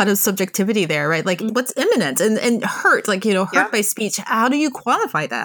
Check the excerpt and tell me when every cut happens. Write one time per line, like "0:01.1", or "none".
0:01.5